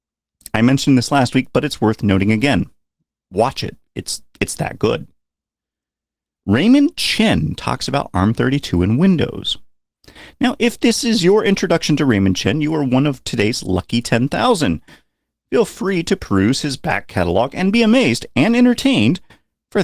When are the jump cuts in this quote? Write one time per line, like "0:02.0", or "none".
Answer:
none